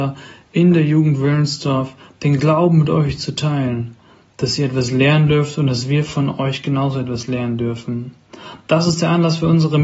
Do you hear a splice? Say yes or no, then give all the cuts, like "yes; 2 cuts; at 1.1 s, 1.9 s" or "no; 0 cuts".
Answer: no; 0 cuts